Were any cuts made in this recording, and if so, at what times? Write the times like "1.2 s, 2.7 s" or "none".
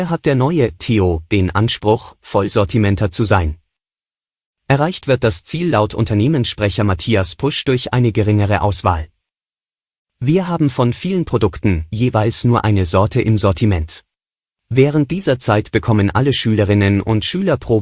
11.9 s, 14.5 s